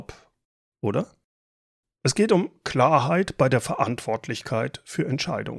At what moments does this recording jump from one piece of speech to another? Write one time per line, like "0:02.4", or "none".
0:01.8